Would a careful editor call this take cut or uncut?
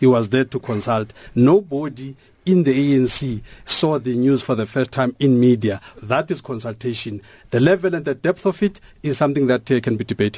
cut